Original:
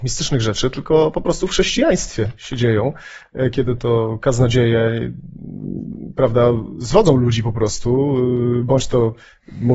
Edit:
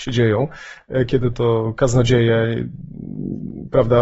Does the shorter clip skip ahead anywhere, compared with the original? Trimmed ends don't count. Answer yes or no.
no